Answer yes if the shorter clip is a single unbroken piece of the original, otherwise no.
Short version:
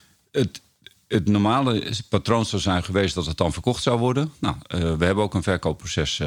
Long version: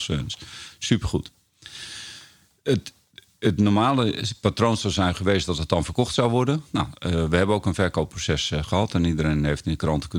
yes